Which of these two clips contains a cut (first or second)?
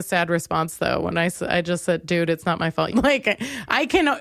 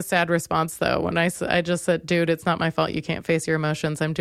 first